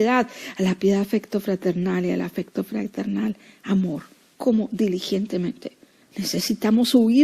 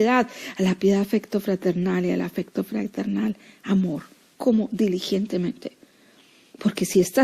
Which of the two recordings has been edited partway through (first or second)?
first